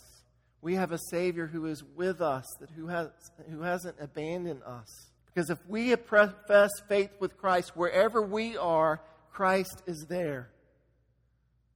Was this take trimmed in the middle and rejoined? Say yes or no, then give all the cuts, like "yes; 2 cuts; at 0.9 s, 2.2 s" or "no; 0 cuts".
yes; 1 cut; at 5.2 s